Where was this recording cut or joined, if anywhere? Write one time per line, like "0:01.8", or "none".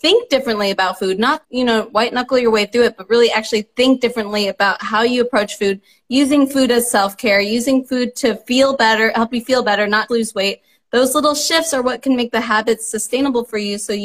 0:01.4
0:10.1